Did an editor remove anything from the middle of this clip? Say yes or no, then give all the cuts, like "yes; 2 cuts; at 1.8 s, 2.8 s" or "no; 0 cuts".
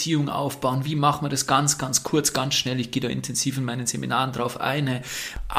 no; 0 cuts